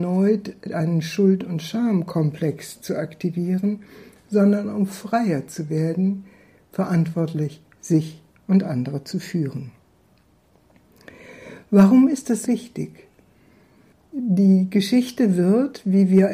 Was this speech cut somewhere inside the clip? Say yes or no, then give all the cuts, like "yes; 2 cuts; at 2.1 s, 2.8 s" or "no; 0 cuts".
yes; 1 cut; at 12.4 s